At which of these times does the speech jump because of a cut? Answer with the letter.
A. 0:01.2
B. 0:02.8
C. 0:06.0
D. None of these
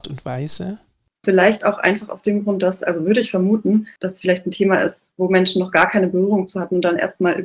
A